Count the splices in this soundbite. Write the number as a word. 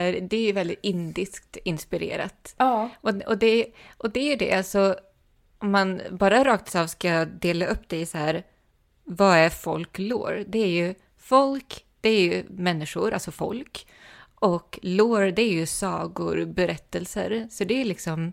zero